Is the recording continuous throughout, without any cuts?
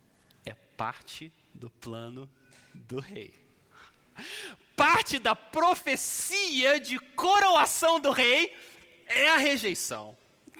yes; 0 cuts

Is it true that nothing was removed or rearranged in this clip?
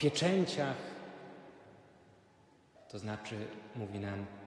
no; 1 cut; at 2.8 s

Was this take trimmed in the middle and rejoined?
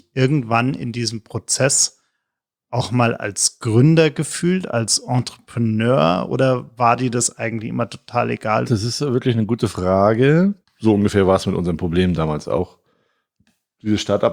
yes; 2 cuts; at 8.6 s, 10.6 s

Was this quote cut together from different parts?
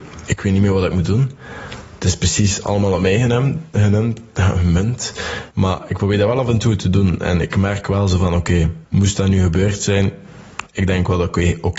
yes; 1 cut; at 5.5 s

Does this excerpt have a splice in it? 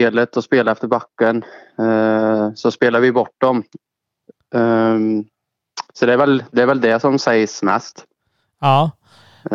no; 0 cuts

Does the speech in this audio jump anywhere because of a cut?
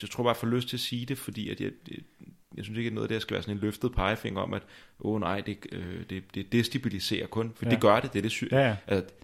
no; 0 cuts

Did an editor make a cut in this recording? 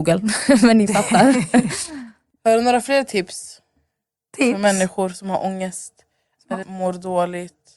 yes; 1 cut; at 6.6 s

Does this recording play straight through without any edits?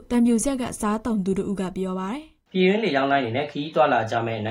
no; 1 cut; at 2.5 s

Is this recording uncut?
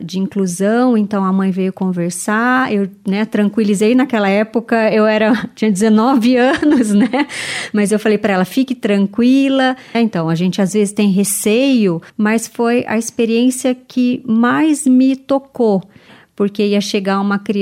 no; 2 cuts; at 9.9 s, 12.1 s

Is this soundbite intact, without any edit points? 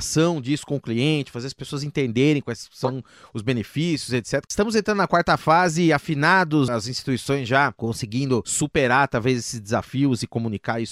no; 2 cuts; at 4.5 s, 6.7 s

